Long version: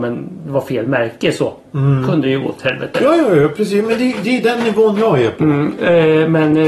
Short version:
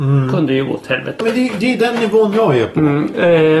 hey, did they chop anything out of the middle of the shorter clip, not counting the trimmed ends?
yes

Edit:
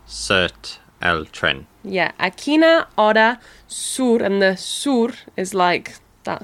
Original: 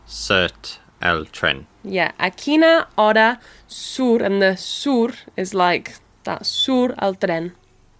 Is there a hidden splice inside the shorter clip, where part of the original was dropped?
no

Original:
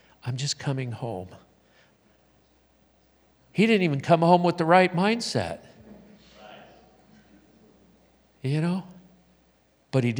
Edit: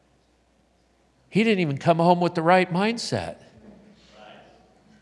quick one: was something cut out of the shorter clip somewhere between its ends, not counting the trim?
no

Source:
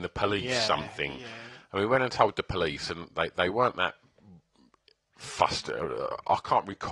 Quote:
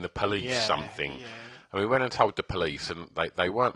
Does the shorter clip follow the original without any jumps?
yes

